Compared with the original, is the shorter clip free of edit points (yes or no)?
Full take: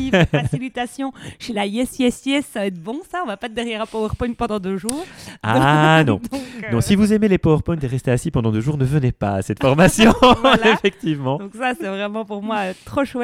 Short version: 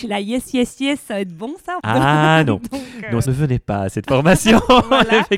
no